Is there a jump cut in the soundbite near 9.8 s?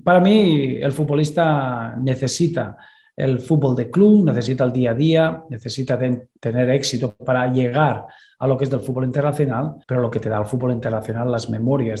yes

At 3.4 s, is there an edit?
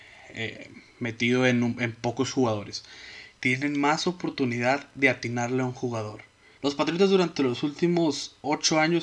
yes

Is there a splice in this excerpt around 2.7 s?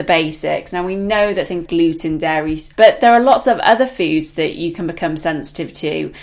yes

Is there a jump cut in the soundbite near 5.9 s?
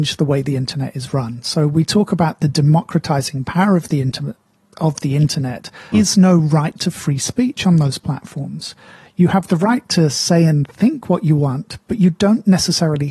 yes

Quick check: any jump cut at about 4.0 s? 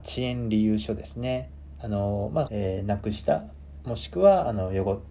no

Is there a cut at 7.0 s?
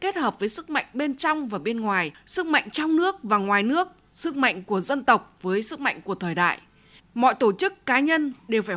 yes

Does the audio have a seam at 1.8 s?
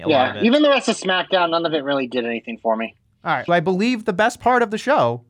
no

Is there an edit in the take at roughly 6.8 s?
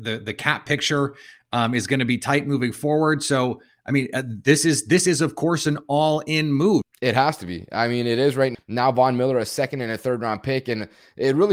yes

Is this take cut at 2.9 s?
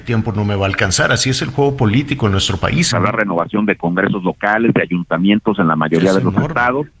yes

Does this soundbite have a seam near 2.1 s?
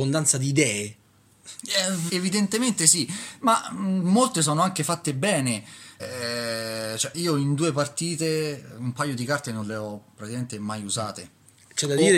yes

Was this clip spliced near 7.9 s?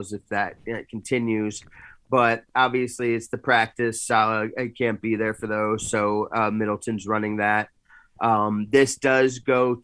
no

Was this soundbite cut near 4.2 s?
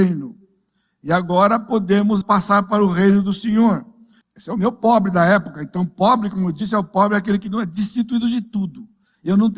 yes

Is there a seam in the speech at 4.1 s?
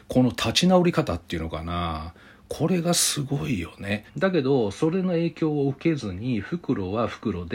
yes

